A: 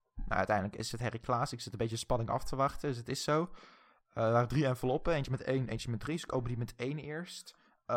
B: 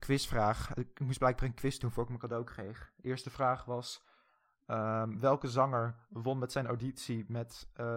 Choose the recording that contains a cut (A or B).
A